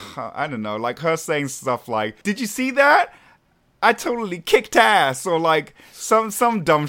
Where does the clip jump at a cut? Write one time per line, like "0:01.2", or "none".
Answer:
0:02.2